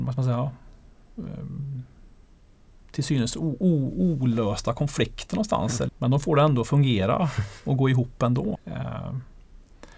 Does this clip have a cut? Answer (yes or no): yes